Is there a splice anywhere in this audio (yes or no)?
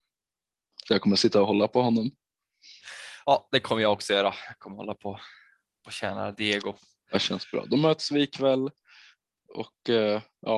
no